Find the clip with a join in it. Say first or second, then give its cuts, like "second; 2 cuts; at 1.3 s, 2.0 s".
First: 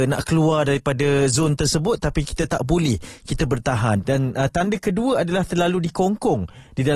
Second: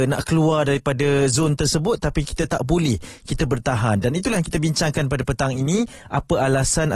first; 1 cut; at 4.0 s